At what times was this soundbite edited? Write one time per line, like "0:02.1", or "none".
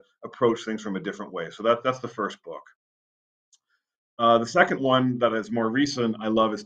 none